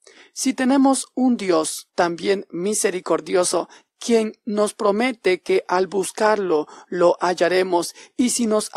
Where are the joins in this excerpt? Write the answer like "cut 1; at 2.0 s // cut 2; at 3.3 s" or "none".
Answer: cut 1; at 1.9 s

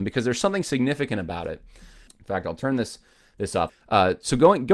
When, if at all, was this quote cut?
cut 1; at 2.1 s // cut 2; at 3.7 s

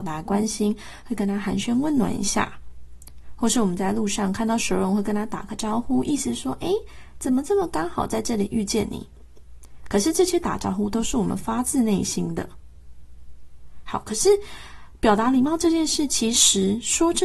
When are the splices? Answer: none

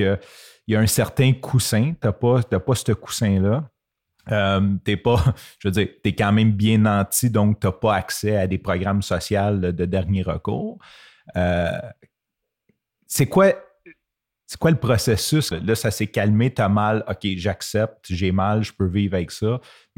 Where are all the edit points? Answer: cut 1; at 15.5 s

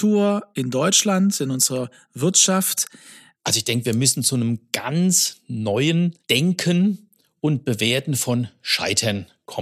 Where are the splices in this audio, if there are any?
cut 1; at 3.3 s // cut 2; at 6.2 s

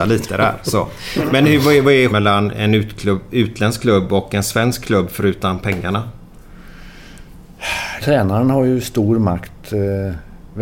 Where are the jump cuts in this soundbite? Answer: cut 1; at 2.1 s // cut 2; at 8.0 s

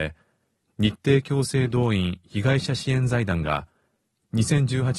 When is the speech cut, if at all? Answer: none

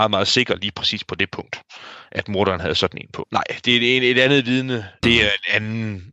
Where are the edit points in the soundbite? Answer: cut 1; at 3.2 s // cut 2; at 5.0 s

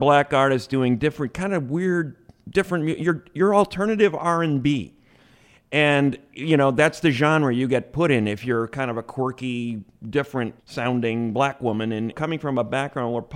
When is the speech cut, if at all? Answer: cut 1; at 10.6 s // cut 2; at 12.1 s

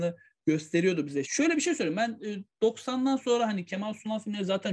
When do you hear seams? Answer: cut 1; at 1.2 s

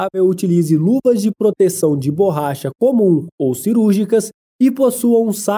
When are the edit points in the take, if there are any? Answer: cut 1; at 4.4 s

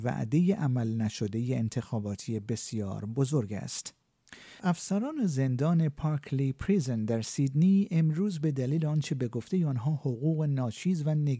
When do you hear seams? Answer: cut 1; at 4.6 s

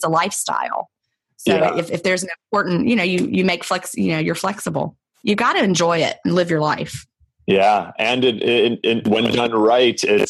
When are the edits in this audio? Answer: none

